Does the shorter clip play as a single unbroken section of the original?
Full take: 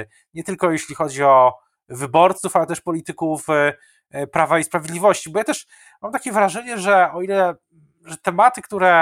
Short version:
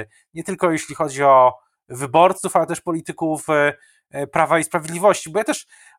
yes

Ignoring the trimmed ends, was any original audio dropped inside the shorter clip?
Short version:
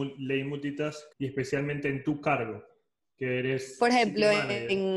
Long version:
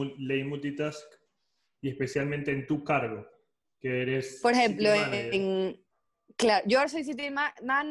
yes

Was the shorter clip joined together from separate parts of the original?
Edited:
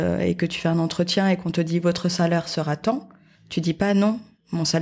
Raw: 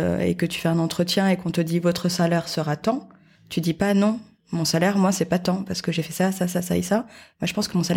no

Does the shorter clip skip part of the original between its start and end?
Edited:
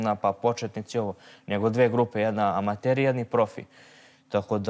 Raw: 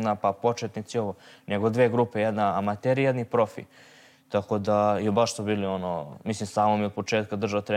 no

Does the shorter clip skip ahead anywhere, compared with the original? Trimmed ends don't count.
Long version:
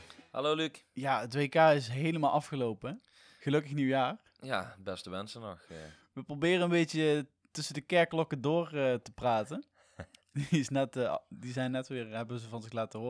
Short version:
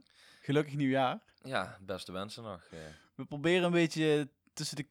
no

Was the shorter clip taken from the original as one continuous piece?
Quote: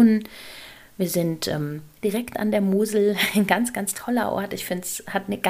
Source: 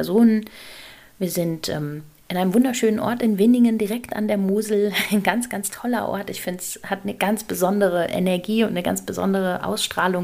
no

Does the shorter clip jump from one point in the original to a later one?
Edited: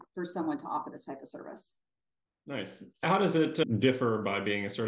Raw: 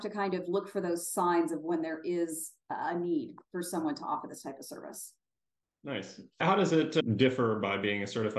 no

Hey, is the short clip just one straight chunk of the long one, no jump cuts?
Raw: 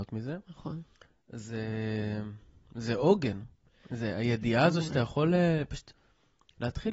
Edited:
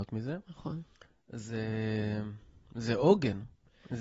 yes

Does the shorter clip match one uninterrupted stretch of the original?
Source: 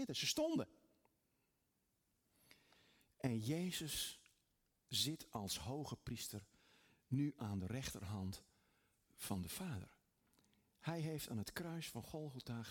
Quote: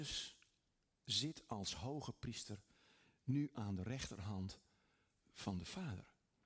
yes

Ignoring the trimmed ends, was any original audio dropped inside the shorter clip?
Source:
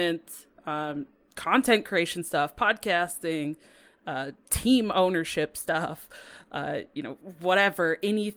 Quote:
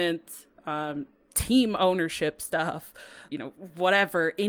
yes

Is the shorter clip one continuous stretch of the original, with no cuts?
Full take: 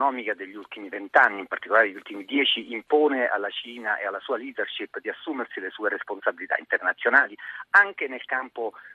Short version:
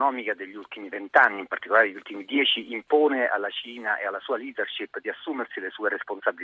yes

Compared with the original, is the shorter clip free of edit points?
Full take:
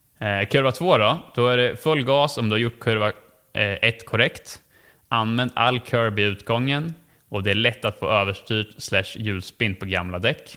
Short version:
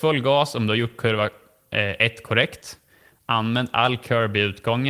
yes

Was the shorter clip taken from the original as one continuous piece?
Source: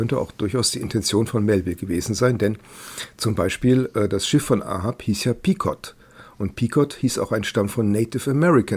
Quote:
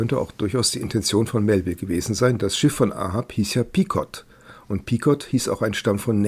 no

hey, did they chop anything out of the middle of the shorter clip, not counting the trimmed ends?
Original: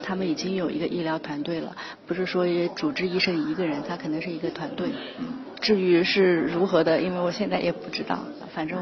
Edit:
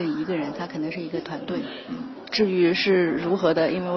no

